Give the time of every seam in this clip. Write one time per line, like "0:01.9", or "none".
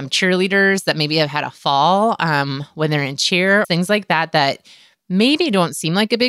0:03.6